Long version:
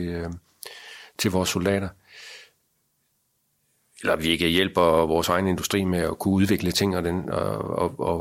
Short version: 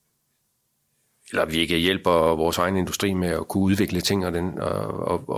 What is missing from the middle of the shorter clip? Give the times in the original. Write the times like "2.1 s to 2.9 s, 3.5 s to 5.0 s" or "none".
none